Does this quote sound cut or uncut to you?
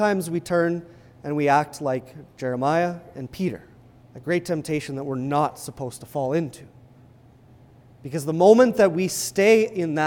cut